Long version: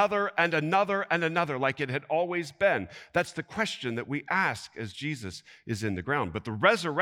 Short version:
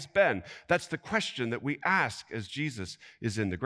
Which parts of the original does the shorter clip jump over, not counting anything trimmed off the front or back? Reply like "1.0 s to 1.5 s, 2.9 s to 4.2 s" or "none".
none